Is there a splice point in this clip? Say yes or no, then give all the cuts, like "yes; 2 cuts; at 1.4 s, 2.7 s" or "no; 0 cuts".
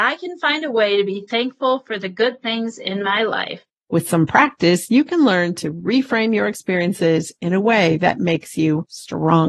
yes; 1 cut; at 3.8 s